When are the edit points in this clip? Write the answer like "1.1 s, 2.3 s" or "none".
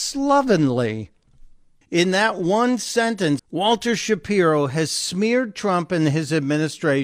1.8 s, 3.4 s